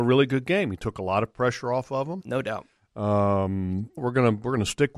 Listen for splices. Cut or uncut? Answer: cut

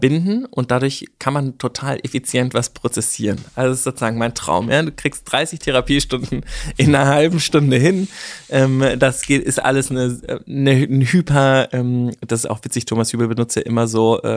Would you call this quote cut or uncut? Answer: uncut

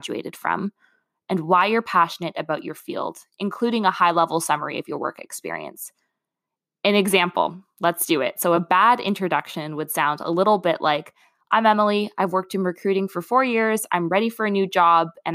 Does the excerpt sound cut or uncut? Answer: uncut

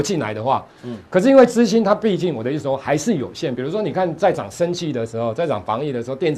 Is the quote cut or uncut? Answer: uncut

